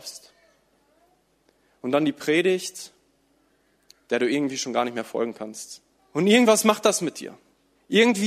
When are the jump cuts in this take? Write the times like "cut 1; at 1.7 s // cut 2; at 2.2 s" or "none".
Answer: cut 1; at 6.0 s

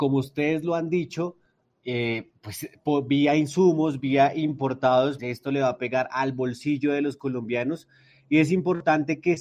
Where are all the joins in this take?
cut 1; at 5.2 s

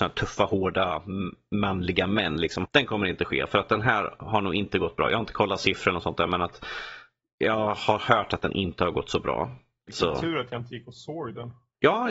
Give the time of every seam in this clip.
cut 1; at 2.7 s // cut 2; at 9.9 s

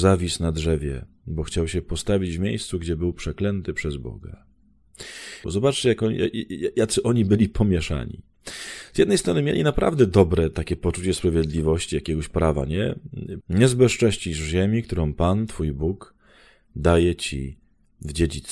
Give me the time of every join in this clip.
cut 1; at 5.4 s // cut 2; at 13.4 s

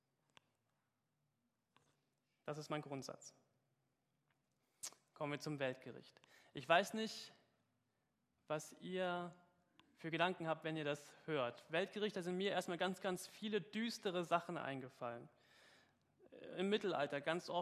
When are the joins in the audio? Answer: none

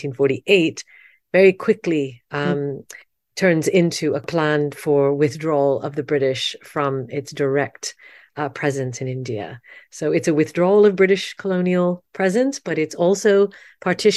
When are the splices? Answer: none

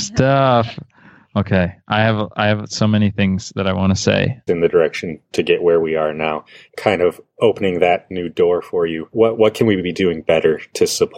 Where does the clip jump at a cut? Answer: cut 1; at 4.5 s // cut 2; at 6.7 s // cut 3; at 9.1 s

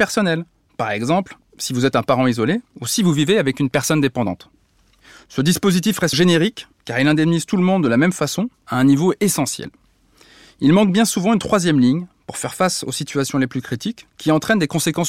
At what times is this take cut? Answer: cut 1; at 6.1 s // cut 2; at 14.1 s

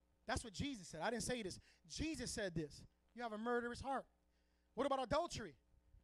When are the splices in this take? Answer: cut 1; at 3.0 s

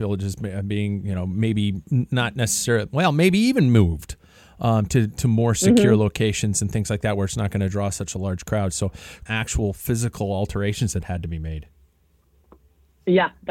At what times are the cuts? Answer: cut 1; at 9.3 s

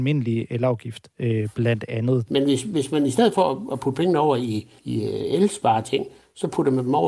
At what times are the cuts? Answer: cut 1; at 2.3 s // cut 2; at 4.8 s

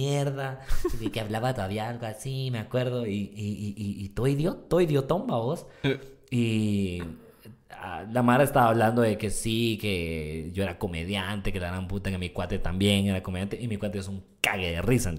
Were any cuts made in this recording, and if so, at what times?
none

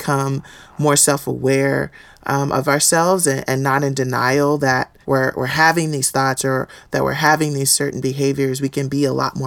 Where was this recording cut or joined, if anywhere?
cut 1; at 5.0 s

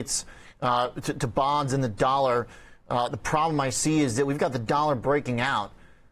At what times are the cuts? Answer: none

